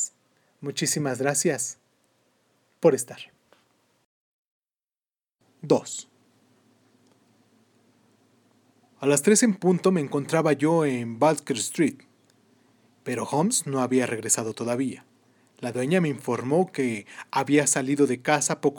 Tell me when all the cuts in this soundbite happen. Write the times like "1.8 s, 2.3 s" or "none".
none